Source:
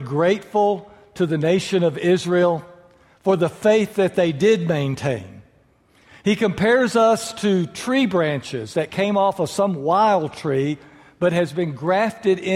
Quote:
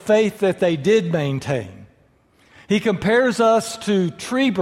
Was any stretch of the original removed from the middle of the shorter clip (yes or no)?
no